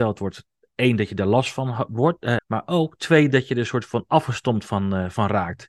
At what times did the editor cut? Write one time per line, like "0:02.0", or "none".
0:02.4